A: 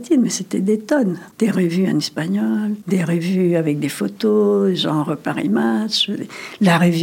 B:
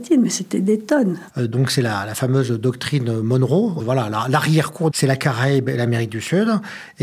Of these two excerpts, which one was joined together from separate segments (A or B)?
B